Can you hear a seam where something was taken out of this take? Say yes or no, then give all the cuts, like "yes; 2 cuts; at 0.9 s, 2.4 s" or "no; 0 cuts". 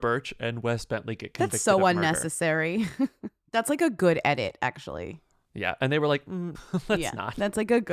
yes; 1 cut; at 6.5 s